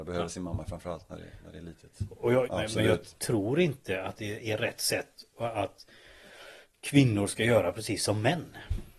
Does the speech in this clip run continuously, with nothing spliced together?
no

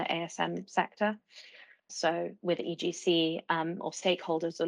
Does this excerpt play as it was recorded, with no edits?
no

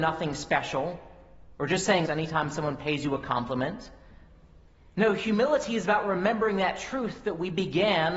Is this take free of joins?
no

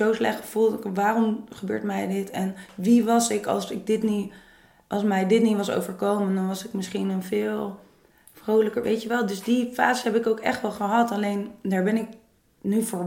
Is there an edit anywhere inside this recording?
no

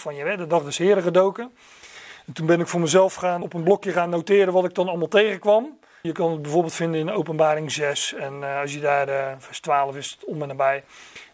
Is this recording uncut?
no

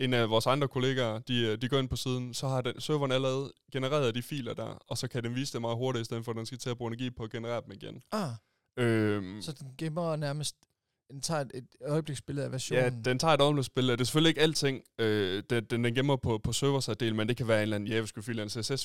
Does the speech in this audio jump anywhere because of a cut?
no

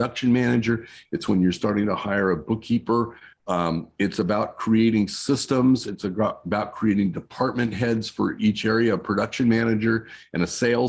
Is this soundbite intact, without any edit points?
no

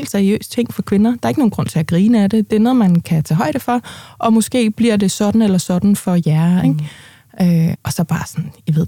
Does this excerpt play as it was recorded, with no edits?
no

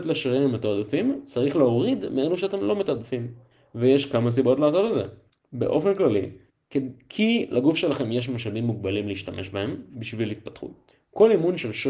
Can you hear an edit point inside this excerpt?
no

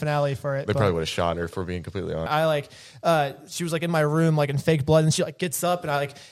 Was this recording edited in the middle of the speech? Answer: yes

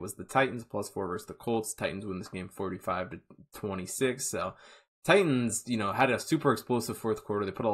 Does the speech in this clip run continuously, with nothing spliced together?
yes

